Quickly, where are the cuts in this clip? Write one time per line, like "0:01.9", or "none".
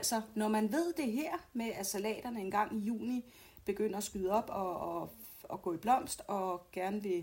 none

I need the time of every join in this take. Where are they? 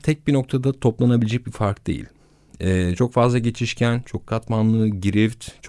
none

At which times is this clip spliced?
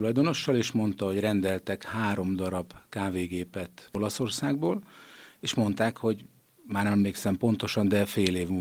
none

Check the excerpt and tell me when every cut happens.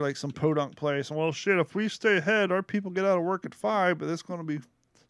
none

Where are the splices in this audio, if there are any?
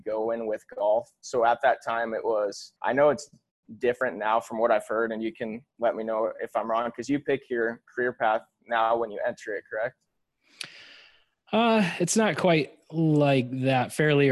0:02.8

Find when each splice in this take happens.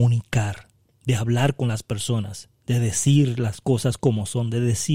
none

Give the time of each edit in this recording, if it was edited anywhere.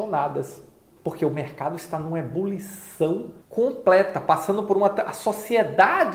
0:01.0
0:03.4

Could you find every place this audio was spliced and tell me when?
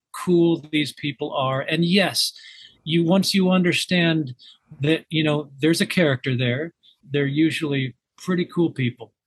0:07.0

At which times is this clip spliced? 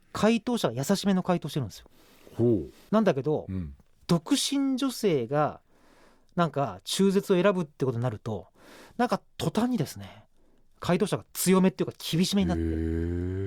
none

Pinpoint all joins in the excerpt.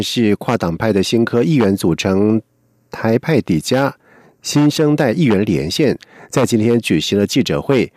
none

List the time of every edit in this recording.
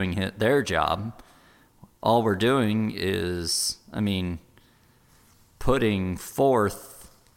none

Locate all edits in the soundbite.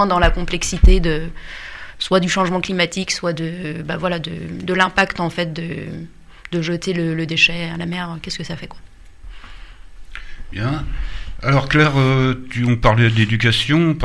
none

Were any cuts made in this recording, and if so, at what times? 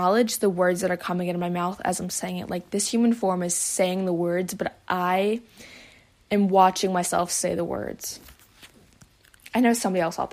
none

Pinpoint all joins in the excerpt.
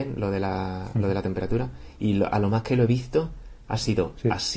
none

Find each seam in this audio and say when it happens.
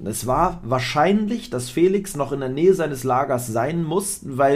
none

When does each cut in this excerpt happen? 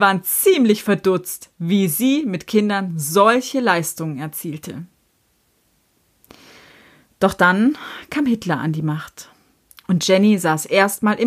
none

